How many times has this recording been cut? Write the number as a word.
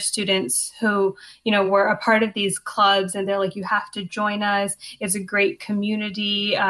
zero